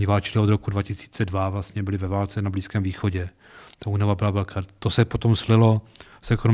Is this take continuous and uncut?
yes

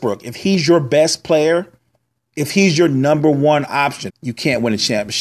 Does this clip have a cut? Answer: yes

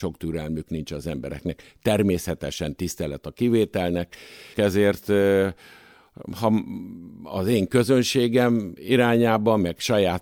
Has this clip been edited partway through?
yes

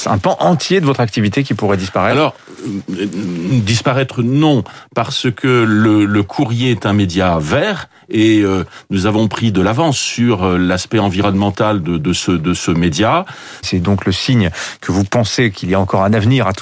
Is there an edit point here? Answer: yes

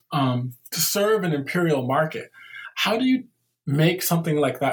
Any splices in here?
no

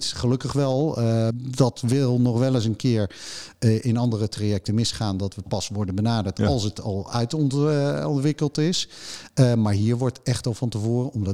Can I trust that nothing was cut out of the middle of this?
no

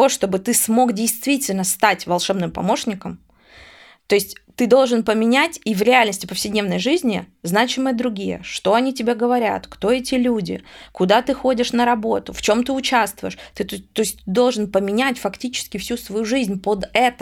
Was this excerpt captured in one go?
yes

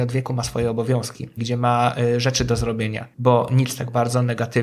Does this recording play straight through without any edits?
no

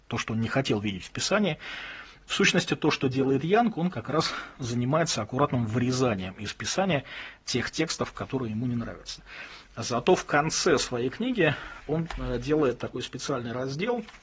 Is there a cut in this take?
no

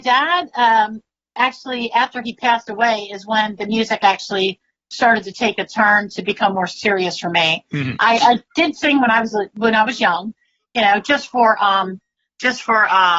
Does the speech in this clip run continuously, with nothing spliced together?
yes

